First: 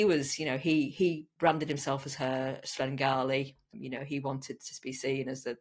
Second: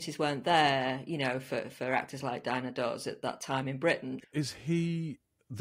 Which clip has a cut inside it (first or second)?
second